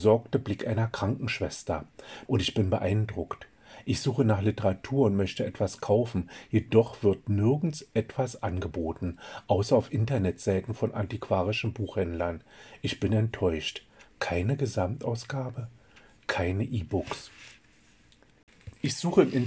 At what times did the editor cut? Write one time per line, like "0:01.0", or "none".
0:02.3